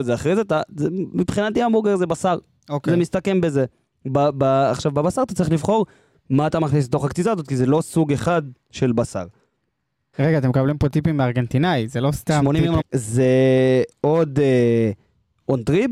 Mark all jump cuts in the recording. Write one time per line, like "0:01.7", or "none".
0:10.1
0:12.8